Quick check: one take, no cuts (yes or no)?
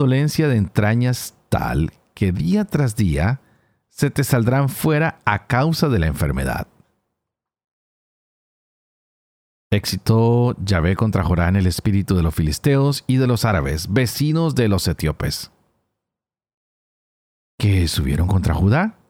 yes